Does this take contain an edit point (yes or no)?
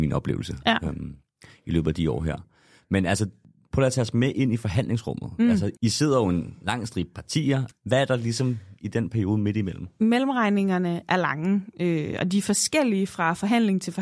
yes